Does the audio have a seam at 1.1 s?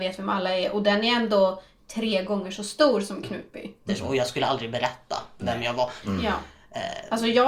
no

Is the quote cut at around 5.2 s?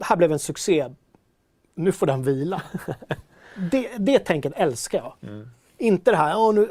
no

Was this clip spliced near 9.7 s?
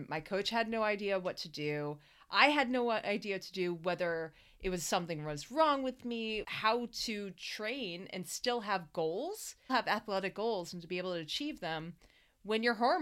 yes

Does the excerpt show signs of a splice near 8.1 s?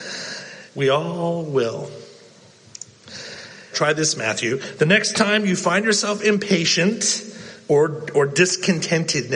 no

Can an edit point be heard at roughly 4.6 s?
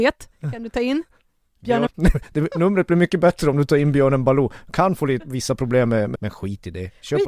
no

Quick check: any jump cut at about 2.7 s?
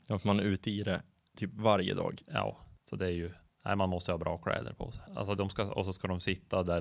no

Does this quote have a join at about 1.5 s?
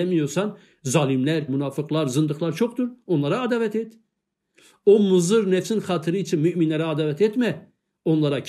yes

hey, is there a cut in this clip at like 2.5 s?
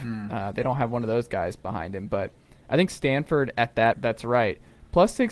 no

